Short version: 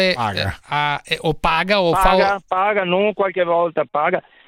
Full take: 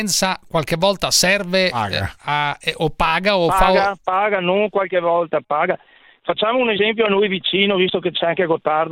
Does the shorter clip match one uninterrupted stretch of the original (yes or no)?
yes